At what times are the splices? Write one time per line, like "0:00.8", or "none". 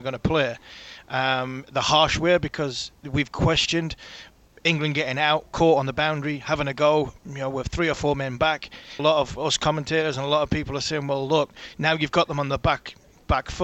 0:09.0